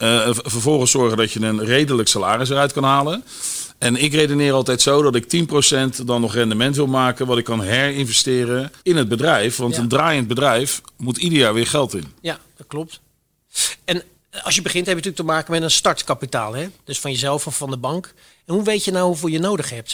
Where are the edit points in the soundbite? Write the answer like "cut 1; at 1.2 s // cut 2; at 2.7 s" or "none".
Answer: cut 1; at 8.8 s